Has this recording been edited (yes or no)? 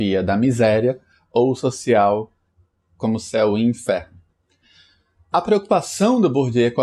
no